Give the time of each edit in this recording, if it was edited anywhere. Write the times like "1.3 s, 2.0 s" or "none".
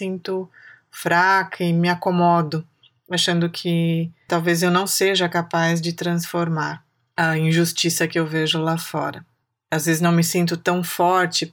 none